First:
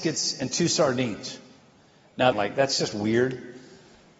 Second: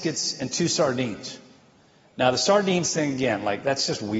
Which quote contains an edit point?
first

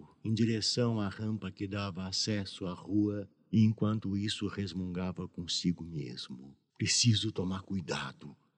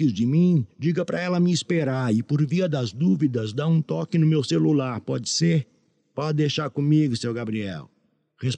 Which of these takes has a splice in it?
first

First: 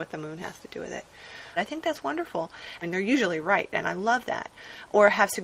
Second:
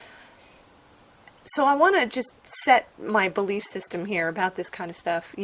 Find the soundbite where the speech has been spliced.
first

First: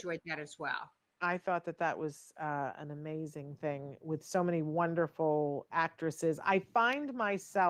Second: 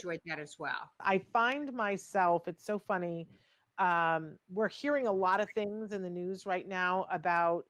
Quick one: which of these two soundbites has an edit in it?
second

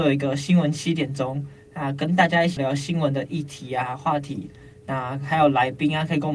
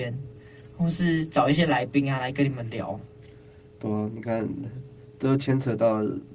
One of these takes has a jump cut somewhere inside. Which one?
first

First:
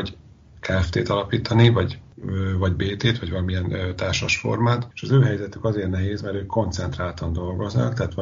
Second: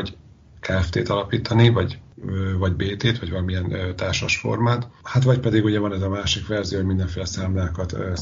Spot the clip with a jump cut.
first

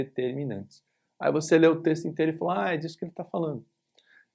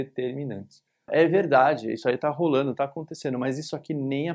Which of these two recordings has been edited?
second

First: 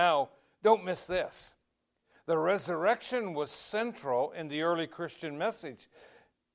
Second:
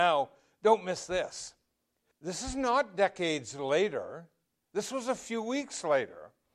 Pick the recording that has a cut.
second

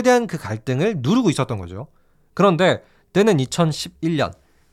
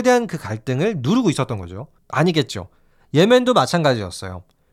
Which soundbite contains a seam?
second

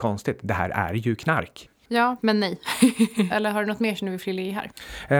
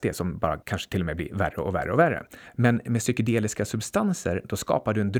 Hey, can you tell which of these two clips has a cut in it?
first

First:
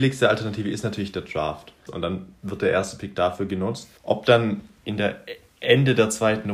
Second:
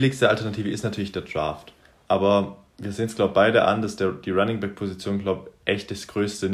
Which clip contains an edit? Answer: first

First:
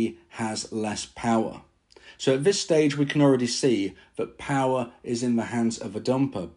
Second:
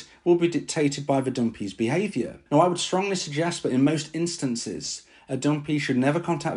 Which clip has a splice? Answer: second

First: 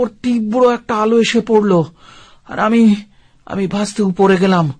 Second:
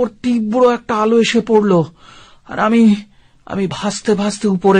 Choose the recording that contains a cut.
first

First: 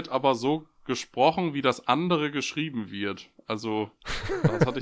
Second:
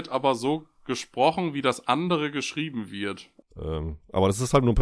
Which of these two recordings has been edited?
second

